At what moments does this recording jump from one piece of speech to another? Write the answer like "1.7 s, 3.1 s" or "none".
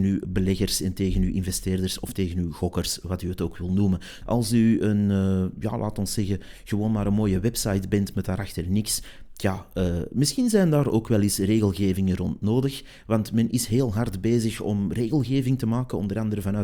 4.2 s